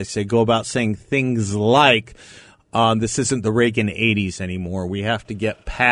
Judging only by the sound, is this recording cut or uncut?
uncut